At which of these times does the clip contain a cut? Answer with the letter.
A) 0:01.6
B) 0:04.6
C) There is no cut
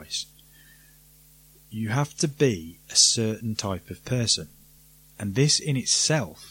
C